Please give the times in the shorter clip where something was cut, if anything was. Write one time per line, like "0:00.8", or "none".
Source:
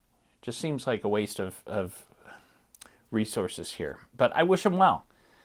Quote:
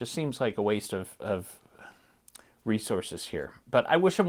none